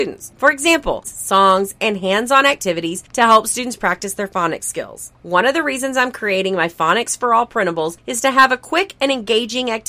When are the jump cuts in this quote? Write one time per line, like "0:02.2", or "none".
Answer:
0:01.0